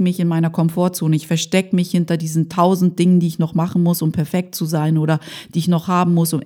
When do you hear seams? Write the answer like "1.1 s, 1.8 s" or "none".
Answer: none